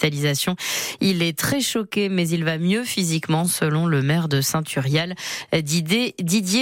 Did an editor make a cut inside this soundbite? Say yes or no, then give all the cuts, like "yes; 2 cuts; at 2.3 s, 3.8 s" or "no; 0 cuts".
no; 0 cuts